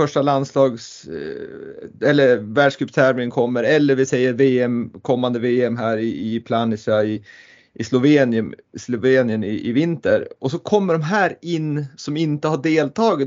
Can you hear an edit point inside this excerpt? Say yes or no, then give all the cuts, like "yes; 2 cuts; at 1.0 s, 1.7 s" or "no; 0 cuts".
yes; 1 cut; at 7.2 s